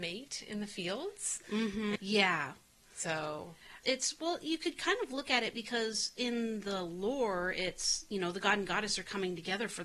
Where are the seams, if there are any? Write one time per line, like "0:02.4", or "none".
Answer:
0:02.0
0:03.8